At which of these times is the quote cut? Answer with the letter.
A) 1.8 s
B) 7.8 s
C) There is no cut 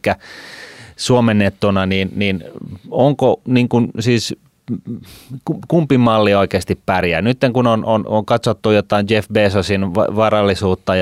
C